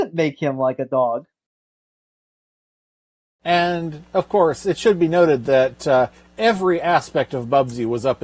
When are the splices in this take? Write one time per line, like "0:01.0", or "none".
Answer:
none

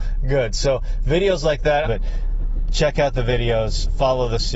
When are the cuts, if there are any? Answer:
0:01.8

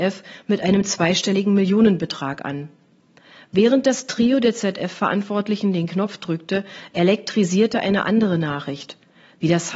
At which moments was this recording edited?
none

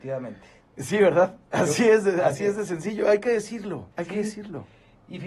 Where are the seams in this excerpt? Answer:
0:03.9

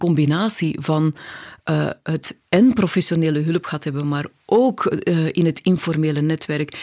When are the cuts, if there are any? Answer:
0:02.5

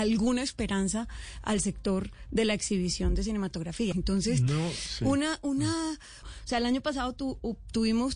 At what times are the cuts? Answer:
0:03.9
0:06.2

